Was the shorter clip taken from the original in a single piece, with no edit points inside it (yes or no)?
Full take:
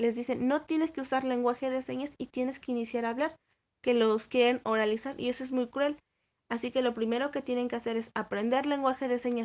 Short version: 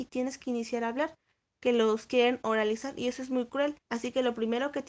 no